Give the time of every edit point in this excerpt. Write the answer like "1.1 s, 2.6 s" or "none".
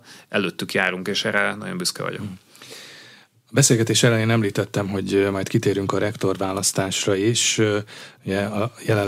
none